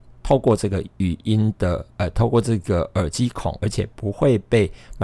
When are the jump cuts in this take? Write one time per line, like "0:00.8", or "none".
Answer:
0:00.9
0:03.6